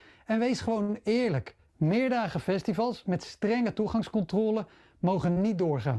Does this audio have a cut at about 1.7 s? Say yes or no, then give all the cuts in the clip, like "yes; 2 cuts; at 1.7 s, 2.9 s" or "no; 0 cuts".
yes; 1 cut; at 1.7 s